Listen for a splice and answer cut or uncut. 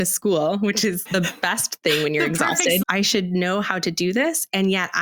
cut